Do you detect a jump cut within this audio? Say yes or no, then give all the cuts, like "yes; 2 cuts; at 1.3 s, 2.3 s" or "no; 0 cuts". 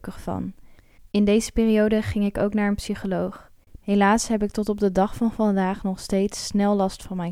yes; 2 cuts; at 1.0 s, 3.8 s